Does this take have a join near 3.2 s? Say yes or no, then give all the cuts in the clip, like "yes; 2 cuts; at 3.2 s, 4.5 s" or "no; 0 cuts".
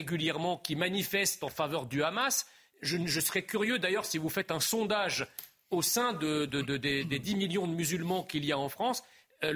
no; 1 cut; at 6.5 s